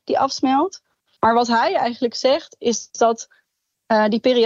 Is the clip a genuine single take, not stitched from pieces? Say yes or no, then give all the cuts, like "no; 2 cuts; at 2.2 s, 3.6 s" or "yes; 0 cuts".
no; 1 cut; at 1.2 s